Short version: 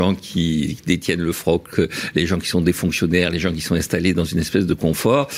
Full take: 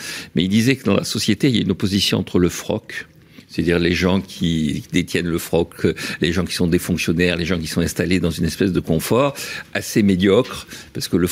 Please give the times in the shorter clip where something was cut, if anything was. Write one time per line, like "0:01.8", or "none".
none